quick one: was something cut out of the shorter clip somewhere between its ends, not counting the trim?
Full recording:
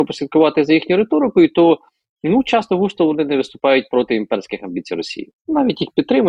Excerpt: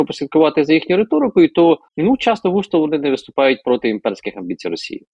yes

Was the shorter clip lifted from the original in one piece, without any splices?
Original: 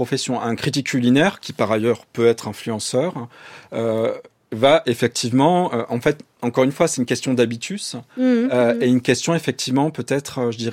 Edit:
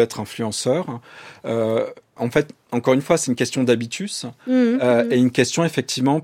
no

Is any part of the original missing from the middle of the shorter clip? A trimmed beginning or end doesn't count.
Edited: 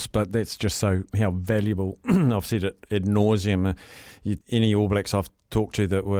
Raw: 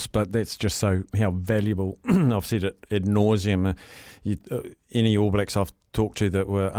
yes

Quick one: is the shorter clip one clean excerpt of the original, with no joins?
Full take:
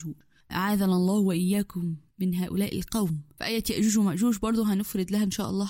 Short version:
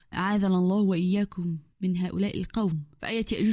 yes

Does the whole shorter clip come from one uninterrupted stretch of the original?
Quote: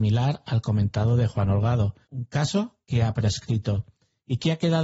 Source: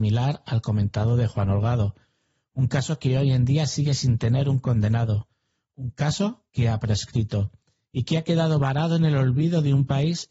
no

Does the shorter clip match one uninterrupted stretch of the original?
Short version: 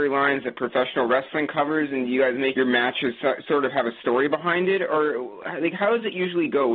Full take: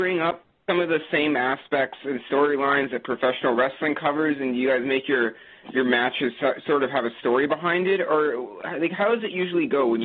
no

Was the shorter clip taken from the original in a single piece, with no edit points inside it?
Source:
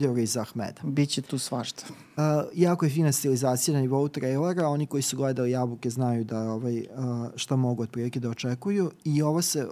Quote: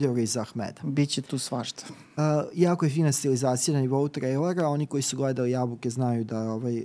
yes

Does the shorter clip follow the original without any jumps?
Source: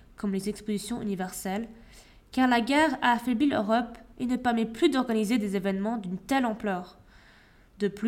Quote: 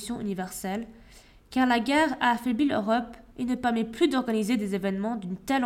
yes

